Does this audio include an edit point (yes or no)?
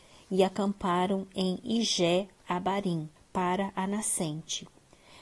yes